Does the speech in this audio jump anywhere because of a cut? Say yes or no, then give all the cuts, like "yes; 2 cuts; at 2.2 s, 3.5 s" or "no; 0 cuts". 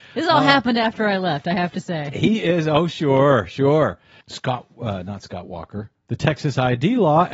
yes; 2 cuts; at 4.2 s, 5.9 s